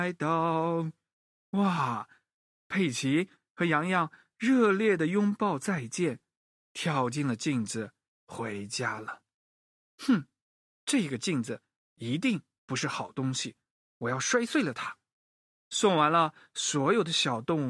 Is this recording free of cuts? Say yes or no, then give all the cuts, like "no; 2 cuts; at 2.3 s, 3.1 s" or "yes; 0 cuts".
yes; 0 cuts